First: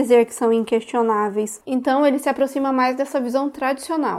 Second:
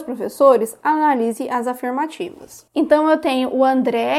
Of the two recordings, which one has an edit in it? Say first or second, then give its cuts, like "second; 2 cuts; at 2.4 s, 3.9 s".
first; 1 cut; at 1.6 s